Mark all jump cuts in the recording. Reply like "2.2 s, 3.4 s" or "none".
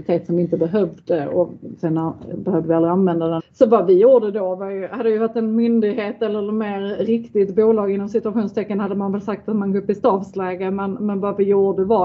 2.3 s, 3.4 s